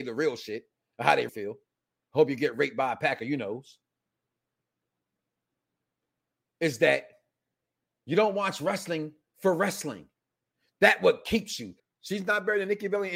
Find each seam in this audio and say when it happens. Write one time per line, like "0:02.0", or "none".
0:01.3
0:11.8